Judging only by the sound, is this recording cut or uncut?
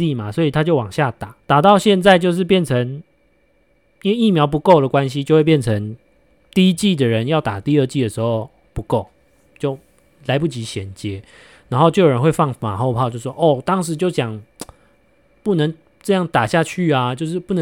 cut